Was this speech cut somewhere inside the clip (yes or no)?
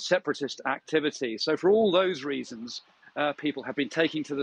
no